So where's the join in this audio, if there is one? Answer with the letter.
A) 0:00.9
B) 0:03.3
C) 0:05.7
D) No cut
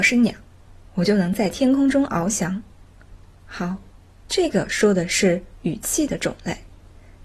B